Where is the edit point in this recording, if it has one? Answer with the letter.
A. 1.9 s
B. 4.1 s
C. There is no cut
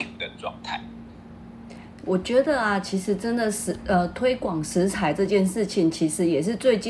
C